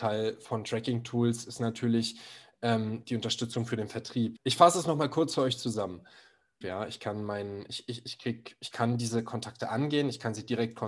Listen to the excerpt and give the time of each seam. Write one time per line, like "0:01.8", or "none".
0:04.4
0:06.6